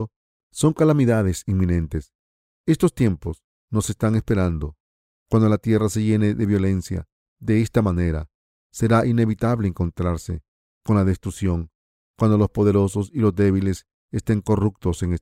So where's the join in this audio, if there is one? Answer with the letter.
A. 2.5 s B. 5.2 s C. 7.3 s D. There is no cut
B